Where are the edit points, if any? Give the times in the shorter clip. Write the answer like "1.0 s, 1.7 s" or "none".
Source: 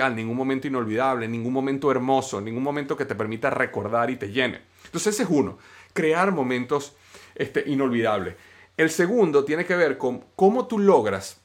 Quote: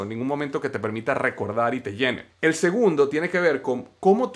2.3 s